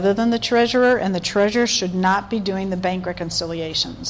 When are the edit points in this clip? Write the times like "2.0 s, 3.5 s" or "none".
none